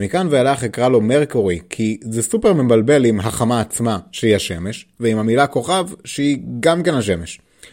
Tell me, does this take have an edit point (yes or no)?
no